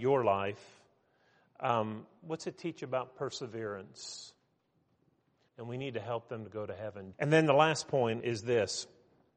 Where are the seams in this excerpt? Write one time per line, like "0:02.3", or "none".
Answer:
0:05.5
0:07.1
0:08.2